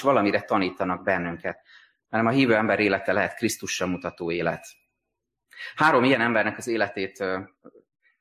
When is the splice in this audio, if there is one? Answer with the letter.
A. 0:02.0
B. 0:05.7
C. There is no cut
A